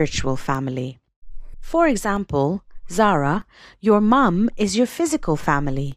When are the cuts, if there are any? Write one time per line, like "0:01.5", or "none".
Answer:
0:01.5